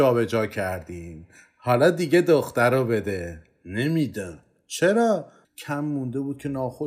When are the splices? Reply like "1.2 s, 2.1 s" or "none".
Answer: 5.4 s